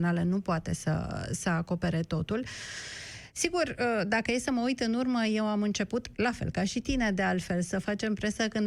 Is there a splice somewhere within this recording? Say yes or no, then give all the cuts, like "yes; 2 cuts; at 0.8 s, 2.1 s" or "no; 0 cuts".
no; 0 cuts